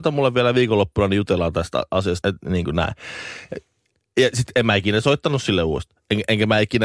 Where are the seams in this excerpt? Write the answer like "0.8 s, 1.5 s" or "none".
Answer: 2.2 s